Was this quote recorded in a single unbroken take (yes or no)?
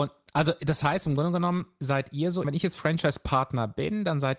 no